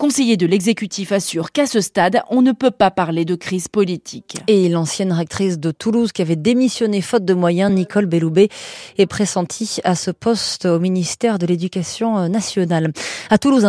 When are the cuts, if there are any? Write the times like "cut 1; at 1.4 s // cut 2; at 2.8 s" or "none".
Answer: none